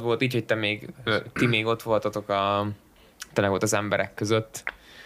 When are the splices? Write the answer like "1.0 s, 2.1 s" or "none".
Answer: 1.4 s